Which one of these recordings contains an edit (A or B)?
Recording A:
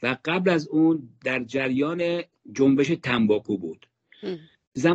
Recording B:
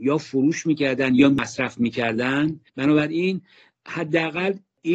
B